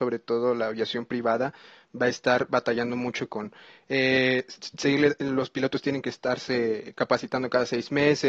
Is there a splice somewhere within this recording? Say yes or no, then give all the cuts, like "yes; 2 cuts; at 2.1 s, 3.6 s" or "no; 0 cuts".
no; 0 cuts